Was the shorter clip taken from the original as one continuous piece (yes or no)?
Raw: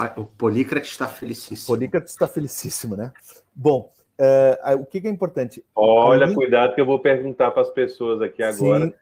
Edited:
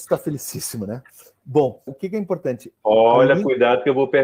no